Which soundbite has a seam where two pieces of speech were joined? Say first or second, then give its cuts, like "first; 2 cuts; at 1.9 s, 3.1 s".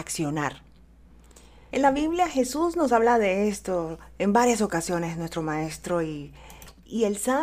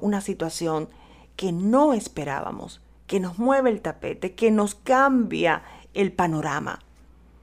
first; 1 cut; at 1.7 s